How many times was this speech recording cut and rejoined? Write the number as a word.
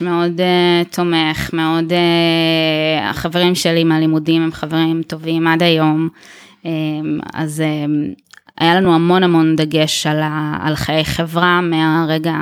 zero